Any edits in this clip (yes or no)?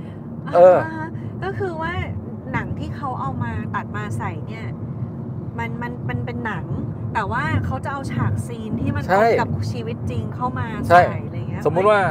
no